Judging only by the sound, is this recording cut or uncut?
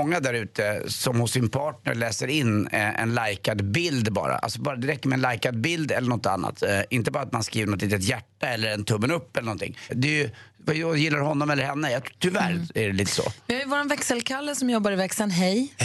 cut